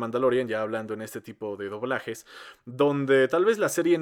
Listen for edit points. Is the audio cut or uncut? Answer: uncut